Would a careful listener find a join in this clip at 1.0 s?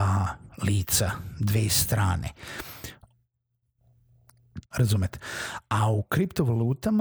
no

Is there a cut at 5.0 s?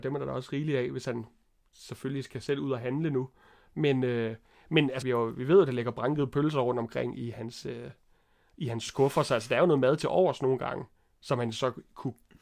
yes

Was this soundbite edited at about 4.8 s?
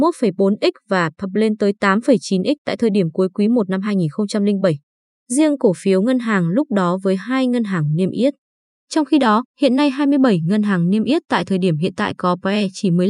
no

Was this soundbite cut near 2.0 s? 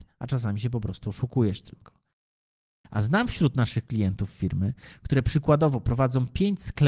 no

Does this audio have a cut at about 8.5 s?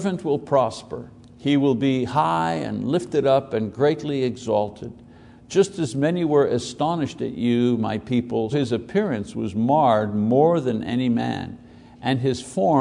yes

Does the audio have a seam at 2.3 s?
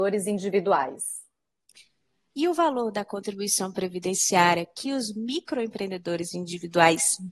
yes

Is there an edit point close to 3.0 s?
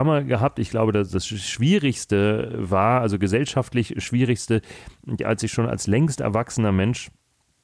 no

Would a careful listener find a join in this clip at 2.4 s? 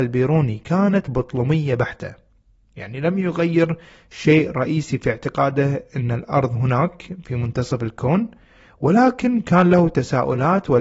no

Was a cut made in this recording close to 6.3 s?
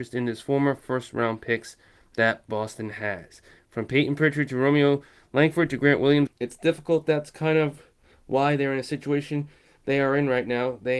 yes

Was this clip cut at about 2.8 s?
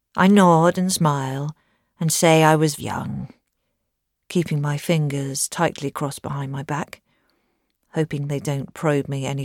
yes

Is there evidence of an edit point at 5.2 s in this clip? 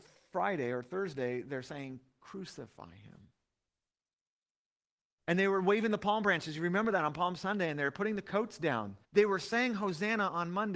yes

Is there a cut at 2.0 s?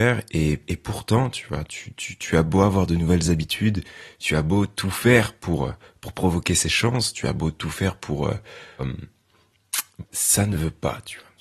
no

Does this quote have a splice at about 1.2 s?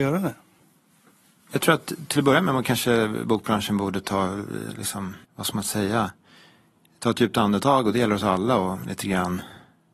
no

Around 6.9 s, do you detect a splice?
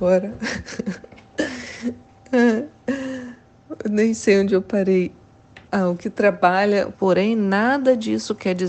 yes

